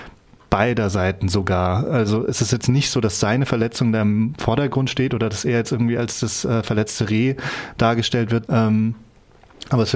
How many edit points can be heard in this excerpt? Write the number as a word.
one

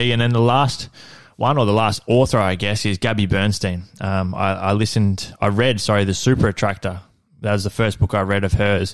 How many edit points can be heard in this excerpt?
zero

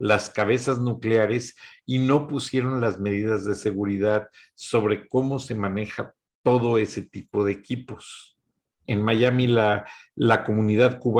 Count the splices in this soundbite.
one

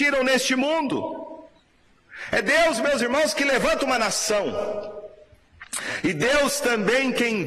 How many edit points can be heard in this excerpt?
zero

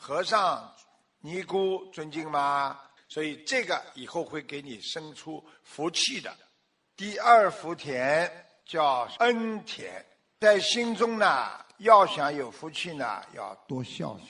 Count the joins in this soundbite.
one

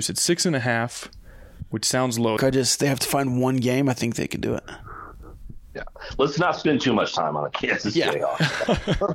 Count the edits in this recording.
one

